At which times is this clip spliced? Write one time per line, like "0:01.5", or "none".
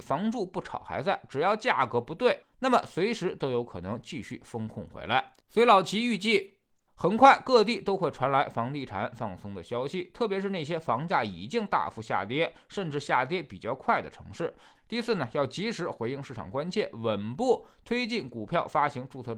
0:05.4
0:14.8